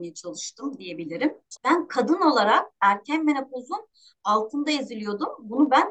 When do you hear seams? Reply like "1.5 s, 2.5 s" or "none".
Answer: 1.6 s